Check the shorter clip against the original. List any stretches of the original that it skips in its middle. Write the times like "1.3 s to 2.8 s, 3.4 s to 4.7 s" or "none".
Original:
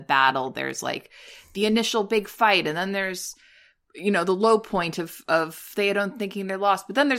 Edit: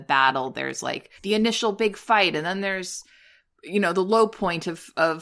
1.2 s to 1.5 s